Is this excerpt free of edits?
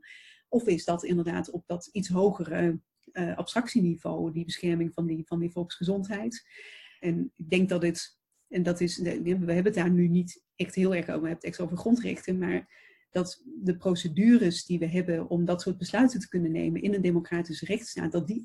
no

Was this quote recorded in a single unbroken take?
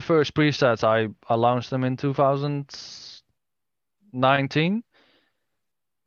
yes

